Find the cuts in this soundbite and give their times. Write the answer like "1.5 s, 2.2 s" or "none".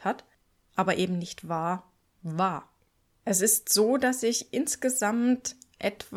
none